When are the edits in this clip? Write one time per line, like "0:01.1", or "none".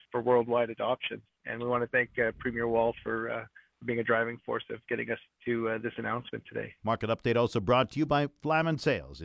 0:01.3
0:06.8